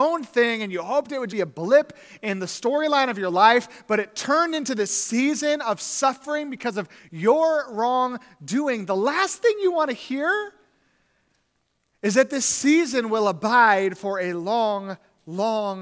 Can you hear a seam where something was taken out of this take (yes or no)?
yes